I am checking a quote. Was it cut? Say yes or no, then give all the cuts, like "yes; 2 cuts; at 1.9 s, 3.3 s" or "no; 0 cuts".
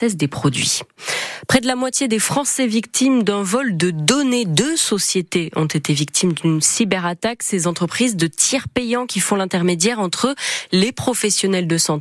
no; 0 cuts